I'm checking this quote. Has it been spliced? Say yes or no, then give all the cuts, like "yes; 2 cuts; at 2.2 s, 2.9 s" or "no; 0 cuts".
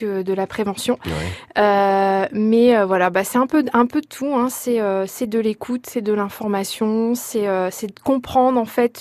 no; 0 cuts